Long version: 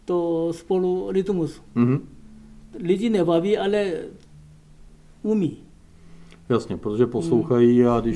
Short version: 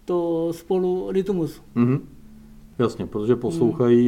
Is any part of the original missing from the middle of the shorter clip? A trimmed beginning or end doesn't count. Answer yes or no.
yes